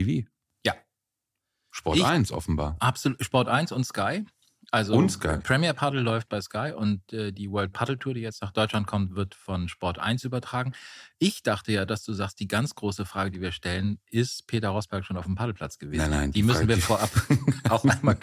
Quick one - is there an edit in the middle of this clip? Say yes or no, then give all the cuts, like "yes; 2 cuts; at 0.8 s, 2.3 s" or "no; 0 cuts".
no; 0 cuts